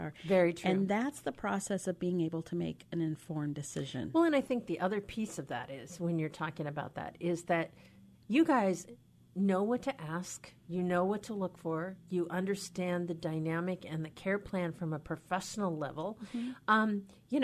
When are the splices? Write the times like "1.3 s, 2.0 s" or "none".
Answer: none